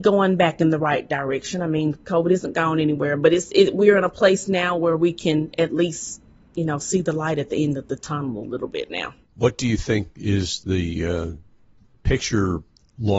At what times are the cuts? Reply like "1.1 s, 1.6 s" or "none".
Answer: 9.2 s